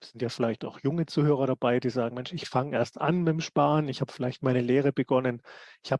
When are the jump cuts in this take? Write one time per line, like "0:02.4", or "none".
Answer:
none